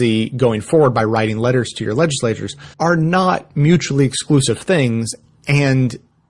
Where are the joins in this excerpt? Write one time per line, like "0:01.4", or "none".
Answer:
0:02.7